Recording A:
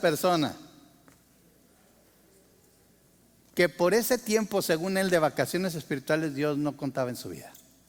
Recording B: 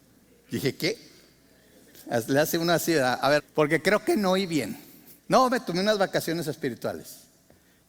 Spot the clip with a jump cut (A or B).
B